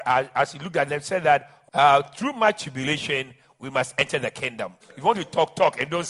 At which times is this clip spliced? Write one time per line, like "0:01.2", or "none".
0:01.7
0:04.8